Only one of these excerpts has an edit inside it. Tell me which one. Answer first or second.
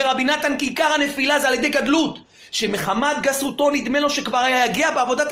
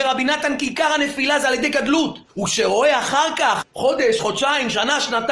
second